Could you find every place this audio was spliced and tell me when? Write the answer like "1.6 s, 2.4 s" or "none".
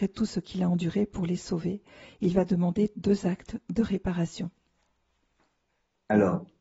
none